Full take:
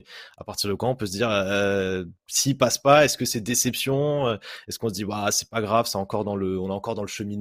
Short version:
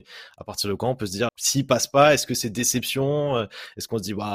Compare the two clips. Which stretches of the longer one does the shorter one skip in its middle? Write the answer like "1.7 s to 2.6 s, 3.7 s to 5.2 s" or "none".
1.3 s to 2.2 s